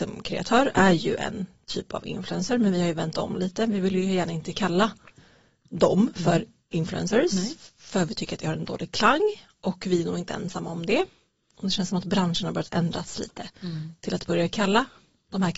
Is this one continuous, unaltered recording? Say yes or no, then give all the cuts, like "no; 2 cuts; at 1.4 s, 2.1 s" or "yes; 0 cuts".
yes; 0 cuts